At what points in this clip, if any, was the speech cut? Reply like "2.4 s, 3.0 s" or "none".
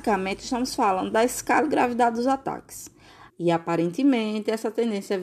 3.3 s